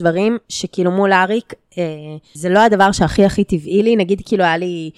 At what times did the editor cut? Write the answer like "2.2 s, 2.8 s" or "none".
2.3 s